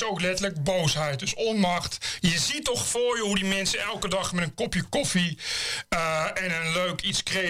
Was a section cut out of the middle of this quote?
no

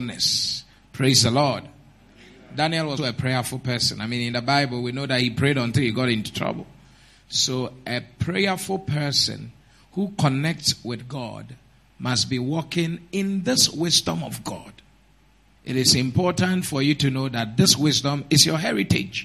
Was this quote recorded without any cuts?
no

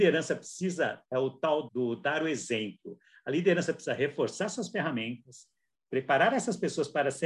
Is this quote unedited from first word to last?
no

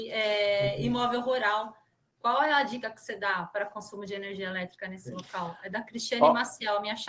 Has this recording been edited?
no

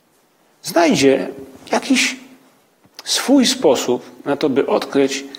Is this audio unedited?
yes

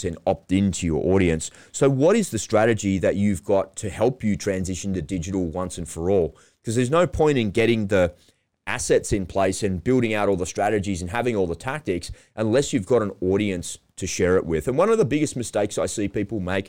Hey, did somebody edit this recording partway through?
no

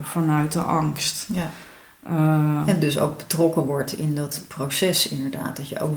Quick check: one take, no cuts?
yes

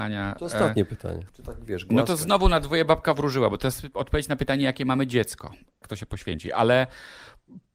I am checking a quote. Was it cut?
yes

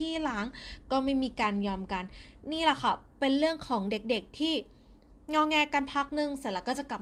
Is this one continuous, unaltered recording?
yes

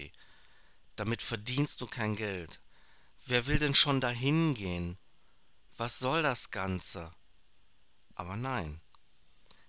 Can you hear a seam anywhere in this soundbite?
no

